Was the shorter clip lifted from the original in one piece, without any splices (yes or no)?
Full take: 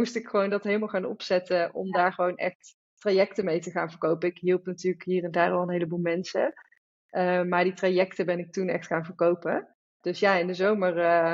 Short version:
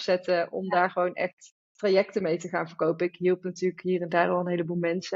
yes